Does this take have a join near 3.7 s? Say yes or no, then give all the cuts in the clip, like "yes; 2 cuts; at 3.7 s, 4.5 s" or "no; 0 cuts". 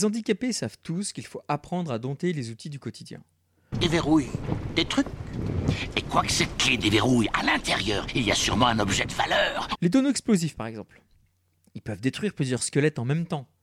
yes; 2 cuts; at 3.7 s, 9.8 s